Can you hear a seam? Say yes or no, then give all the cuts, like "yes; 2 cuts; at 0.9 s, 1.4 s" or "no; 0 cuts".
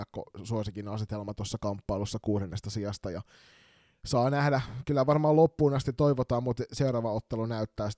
no; 0 cuts